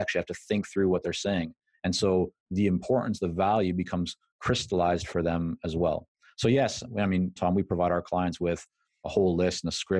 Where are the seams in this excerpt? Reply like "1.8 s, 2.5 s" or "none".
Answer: 7.4 s